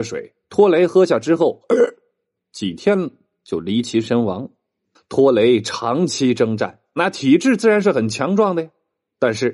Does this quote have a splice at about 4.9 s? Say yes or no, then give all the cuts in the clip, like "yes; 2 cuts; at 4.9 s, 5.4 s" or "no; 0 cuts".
yes; 1 cut; at 4.9 s